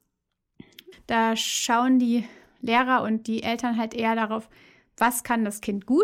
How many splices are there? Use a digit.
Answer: 1